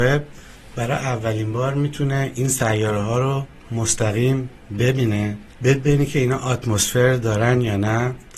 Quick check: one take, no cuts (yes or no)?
no